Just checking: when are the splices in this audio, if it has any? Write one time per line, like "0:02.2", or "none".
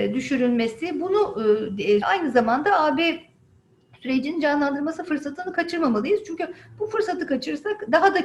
0:02.0